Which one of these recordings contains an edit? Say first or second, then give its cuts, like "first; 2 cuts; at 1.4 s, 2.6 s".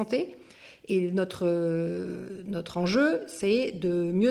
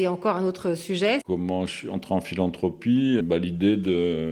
second; 2 cuts; at 1.2 s, 3.2 s